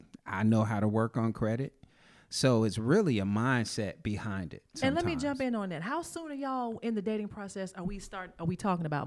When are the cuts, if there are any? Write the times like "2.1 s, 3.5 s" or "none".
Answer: 4.7 s